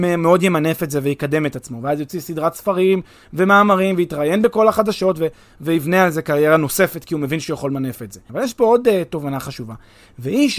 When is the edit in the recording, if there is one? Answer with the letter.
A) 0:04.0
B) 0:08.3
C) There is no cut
B